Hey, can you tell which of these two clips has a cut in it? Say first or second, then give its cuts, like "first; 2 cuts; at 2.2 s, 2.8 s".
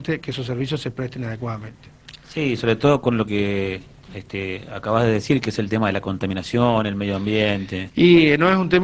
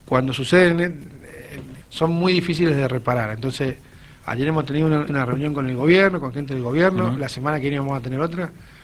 second; 2 cuts; at 1.8 s, 5.1 s